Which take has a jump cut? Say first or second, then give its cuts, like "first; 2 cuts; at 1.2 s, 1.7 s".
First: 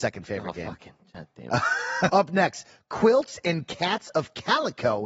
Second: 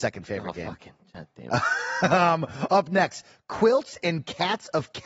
first; 1 cut; at 2.1 s